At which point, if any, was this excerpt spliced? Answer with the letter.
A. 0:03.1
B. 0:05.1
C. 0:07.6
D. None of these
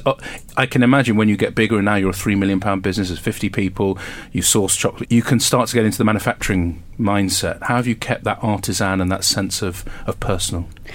B